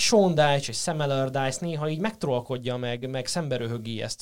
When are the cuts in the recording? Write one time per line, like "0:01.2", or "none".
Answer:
0:03.0